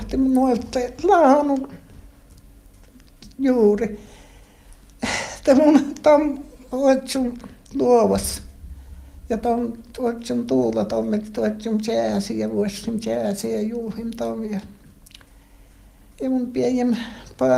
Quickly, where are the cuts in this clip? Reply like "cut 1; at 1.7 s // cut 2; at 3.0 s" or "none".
none